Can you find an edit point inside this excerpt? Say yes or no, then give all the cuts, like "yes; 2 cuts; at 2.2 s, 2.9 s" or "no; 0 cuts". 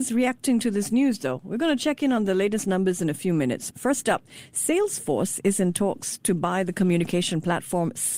yes; 1 cut; at 3.7 s